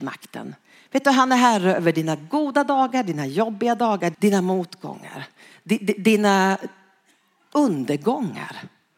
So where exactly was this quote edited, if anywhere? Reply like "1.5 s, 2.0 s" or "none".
4.1 s